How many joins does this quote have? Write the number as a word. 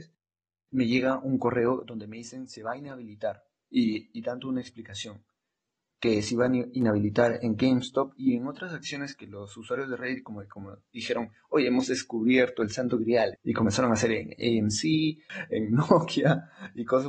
two